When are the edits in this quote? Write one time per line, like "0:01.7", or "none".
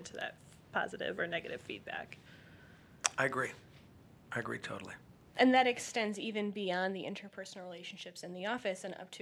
none